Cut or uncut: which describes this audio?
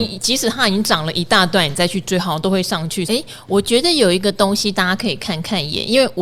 cut